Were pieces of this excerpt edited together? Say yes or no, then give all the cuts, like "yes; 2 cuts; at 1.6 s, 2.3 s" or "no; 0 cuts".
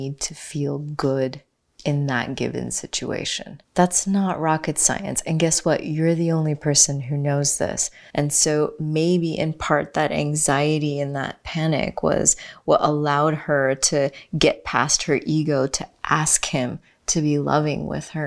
yes; 2 cuts; at 3.6 s, 8.1 s